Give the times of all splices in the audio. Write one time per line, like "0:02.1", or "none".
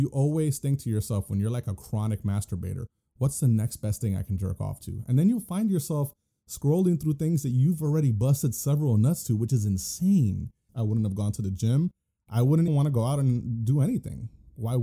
0:10.7
0:12.7